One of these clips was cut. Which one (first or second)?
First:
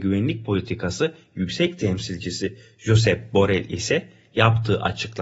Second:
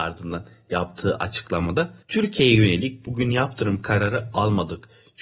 second